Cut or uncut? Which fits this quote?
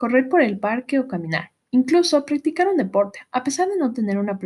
uncut